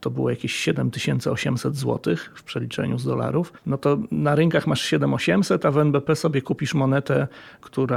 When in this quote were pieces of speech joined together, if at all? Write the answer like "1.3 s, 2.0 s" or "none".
3.6 s